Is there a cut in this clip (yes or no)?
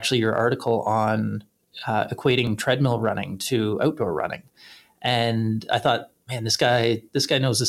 no